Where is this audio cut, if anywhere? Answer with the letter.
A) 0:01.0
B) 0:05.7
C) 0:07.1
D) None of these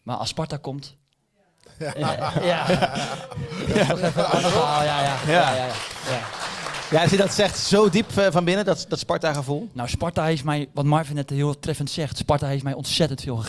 D